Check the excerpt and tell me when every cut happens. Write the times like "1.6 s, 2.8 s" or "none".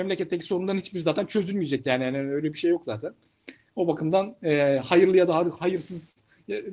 none